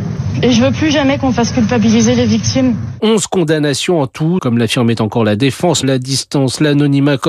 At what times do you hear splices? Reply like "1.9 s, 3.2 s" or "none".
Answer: 4.4 s, 5.8 s